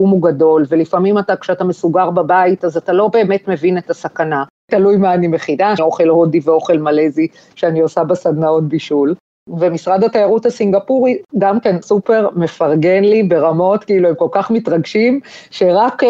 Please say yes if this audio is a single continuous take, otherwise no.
no